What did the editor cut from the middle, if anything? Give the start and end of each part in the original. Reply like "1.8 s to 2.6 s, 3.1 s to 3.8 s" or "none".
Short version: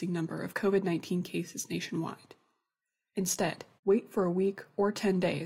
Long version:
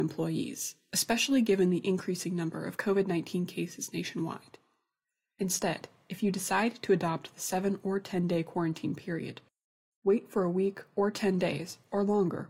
6.0 s to 9.9 s